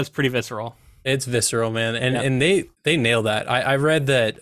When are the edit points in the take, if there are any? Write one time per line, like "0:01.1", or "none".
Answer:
0:02.7